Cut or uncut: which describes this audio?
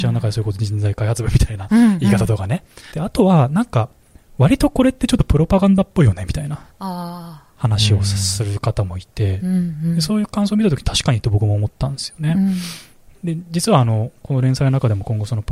cut